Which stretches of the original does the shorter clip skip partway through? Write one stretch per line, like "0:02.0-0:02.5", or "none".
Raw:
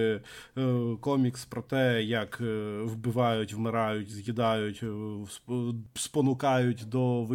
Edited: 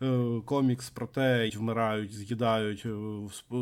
0:02.1-0:03.5